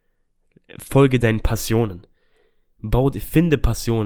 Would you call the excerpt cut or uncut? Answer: uncut